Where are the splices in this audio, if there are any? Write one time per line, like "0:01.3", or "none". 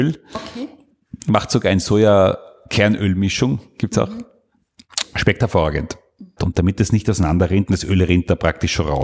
0:06.4
0:07.7